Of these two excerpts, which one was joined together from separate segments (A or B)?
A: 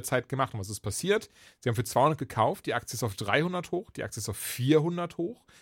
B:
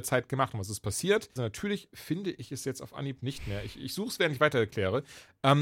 B